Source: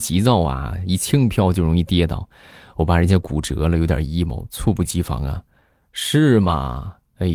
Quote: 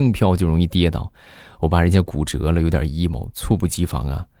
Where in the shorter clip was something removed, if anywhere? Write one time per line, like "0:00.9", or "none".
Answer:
none